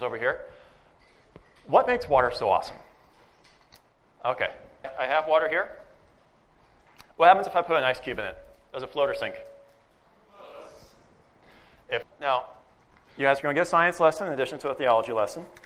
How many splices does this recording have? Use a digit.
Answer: 2